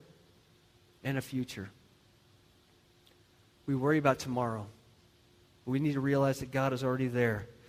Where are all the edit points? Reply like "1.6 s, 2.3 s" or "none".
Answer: none